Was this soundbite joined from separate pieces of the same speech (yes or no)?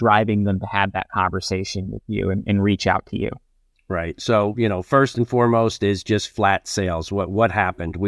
no